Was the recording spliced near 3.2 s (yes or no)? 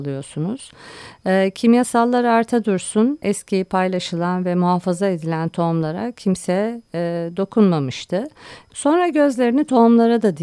yes